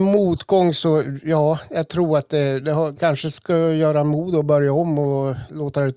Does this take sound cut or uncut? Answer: cut